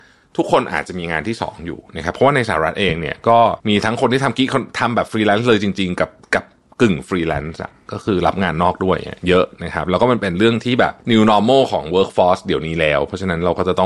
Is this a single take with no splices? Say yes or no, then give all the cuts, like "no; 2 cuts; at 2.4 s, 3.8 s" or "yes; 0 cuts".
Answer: no; 2 cuts; at 3.6 s, 11.0 s